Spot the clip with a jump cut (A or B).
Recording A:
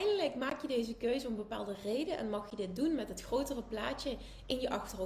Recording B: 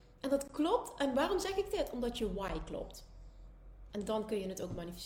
B